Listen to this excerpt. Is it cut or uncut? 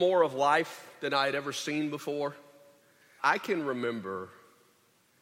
cut